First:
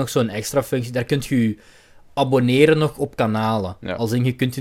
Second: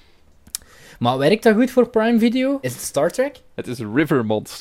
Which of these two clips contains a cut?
second; 1 cut; at 2.6 s

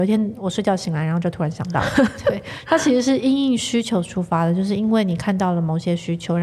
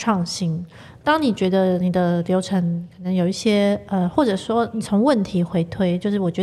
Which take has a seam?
second; 1 cut; at 1.0 s

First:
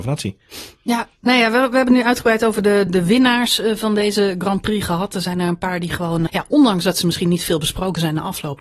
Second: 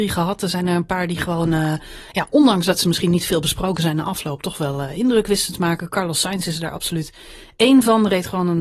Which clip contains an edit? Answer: first; 2 cuts; at 2.9 s, 6.3 s

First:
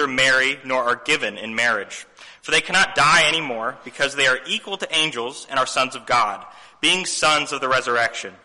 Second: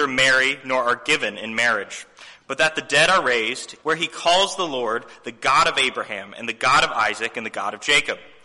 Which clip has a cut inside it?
second; 2 cuts; at 2.4 s, 3.8 s

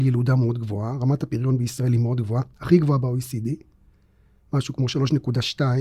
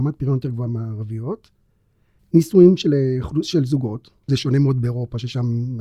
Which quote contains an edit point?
second; 2 cuts; at 2.2 s, 4.3 s

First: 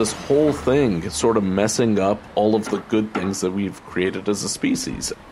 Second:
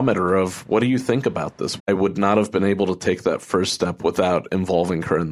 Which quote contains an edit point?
second; 1 cut; at 1.8 s

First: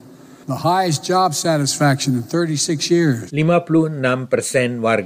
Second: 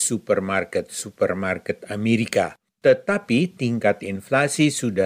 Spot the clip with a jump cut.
first; 1 cut; at 3.3 s

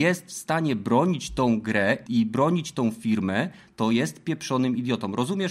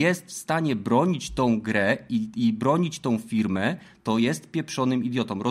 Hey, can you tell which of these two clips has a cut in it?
first; 1 cut; at 2.1 s

